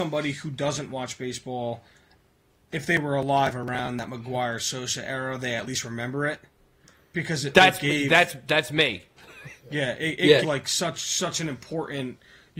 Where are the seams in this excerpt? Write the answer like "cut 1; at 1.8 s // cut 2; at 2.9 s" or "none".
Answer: cut 1; at 10.4 s

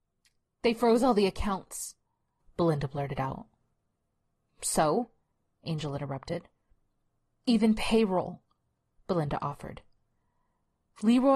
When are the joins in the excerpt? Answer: none

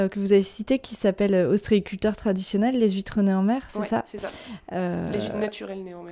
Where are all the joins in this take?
none

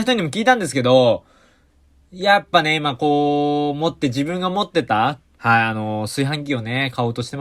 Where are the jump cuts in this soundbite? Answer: cut 1; at 5.3 s

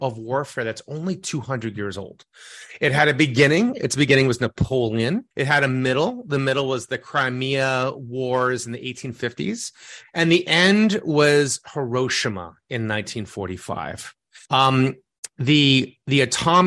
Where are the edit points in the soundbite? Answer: cut 1; at 5.3 s // cut 2; at 14.5 s

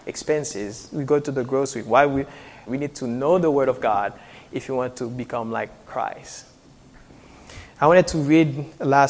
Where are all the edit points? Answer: cut 1; at 2.7 s

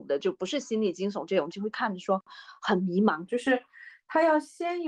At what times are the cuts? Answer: cut 1; at 1.5 s // cut 2; at 3.3 s

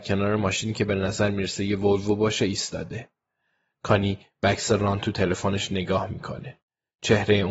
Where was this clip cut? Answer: cut 1; at 3.7 s

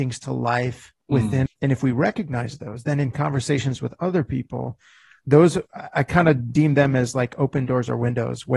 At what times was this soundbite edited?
cut 1; at 1.5 s

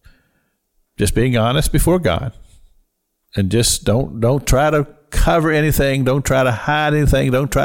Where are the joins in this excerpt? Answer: none

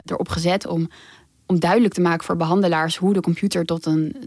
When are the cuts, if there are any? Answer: none

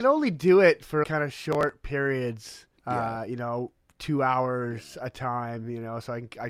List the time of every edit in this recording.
cut 1; at 1.0 s // cut 2; at 2.8 s

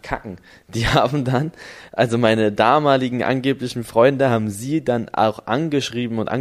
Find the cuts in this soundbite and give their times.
none

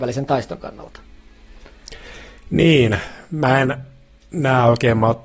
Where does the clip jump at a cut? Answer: none

